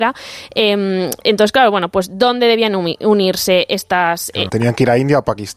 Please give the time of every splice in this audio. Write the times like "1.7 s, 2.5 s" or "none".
4.5 s